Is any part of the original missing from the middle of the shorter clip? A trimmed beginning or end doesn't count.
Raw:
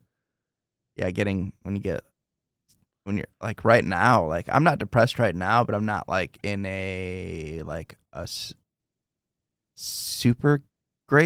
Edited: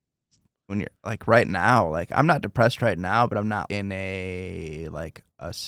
yes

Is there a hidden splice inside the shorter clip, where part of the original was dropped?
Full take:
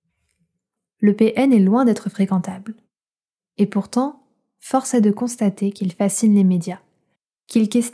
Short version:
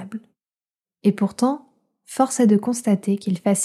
no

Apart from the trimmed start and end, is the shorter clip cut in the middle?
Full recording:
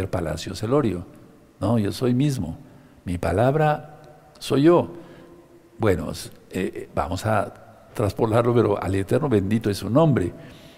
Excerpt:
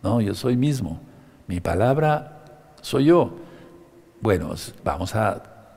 yes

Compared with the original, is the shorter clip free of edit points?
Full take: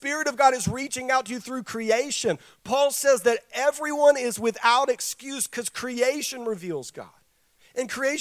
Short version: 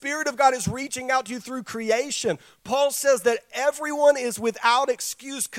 yes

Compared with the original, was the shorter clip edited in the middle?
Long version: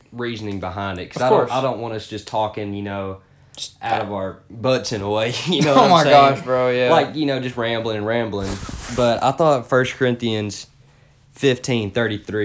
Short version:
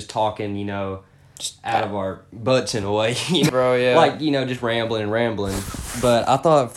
yes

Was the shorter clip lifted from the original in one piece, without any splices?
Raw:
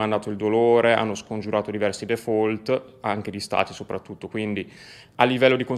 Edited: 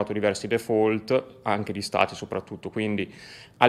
yes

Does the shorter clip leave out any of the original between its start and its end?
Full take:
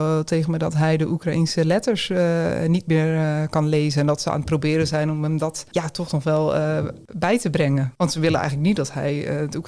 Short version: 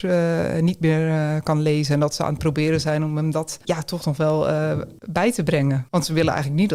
no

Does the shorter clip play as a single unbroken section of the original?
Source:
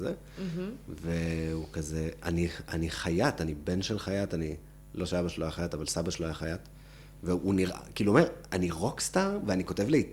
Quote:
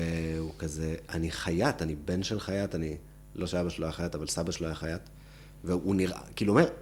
no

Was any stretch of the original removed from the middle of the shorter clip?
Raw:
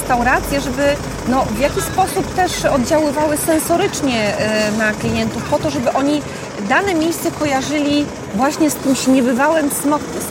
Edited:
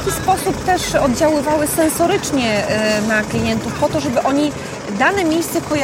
no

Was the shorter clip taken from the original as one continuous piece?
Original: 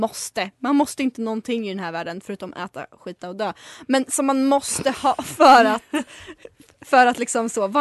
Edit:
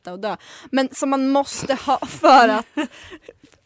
yes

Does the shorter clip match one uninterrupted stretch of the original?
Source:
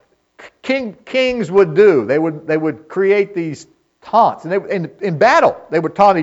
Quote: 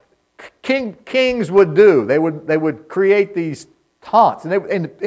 yes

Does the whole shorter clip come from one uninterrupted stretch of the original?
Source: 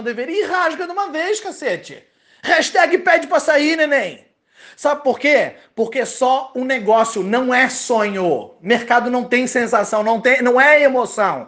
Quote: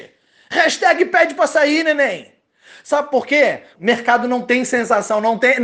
no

